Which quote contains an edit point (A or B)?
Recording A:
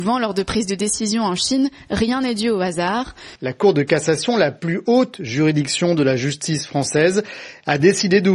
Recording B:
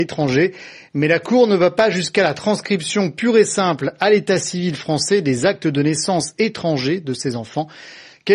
A